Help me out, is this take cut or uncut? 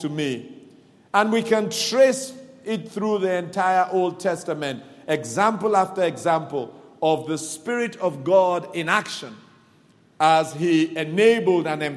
uncut